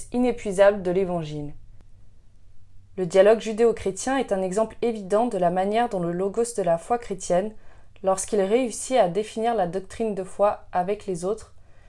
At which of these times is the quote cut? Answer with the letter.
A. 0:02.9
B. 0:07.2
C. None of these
A